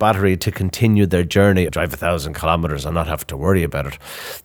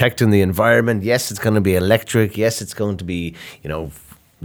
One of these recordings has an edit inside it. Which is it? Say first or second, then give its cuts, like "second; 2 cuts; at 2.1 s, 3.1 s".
first; 1 cut; at 1.7 s